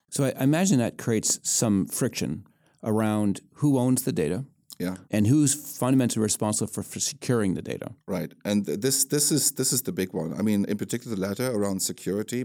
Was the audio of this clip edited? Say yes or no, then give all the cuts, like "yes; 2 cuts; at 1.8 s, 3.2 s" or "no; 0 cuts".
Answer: yes; 1 cut; at 5.0 s